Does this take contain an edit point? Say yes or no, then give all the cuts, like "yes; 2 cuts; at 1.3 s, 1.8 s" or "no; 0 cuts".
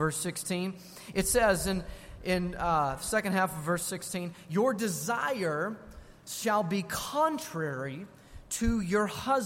no; 0 cuts